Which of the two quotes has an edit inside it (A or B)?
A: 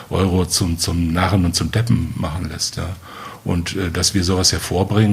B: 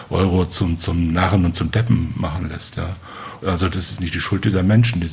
B